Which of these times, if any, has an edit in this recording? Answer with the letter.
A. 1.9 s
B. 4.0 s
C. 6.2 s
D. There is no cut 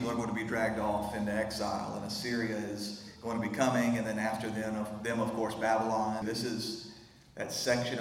C